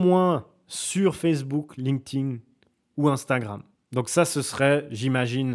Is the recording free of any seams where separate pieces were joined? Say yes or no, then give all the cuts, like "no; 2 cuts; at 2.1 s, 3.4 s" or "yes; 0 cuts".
yes; 0 cuts